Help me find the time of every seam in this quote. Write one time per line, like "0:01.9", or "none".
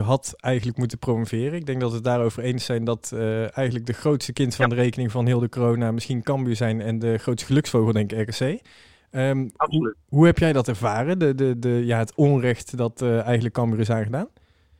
none